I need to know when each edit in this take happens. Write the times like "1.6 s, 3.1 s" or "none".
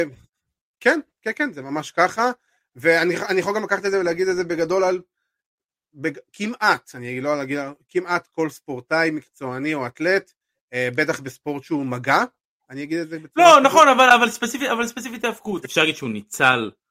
15.6 s